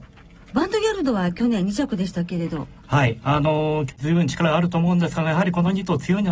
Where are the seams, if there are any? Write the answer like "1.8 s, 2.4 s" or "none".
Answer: 2.8 s, 3.9 s